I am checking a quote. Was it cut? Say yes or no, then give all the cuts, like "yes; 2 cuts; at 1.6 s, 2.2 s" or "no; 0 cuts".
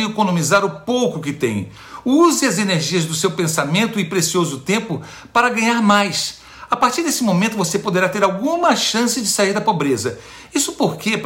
no; 0 cuts